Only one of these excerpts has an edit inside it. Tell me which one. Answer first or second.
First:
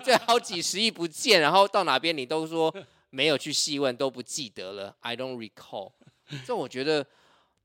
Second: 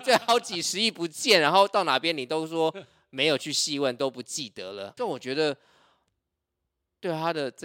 second